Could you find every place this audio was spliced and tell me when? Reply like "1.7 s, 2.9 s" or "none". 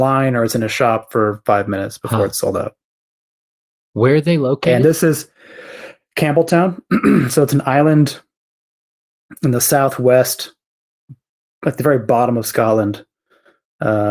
none